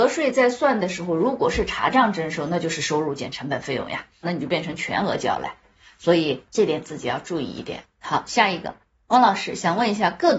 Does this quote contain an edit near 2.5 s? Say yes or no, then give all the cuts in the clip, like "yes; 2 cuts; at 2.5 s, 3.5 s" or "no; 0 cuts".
no; 2 cuts; at 4.2 s, 7.9 s